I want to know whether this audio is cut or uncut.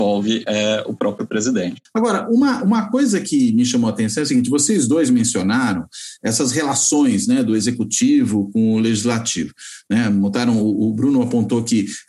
uncut